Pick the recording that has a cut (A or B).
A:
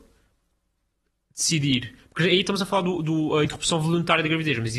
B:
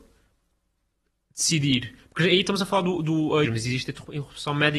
B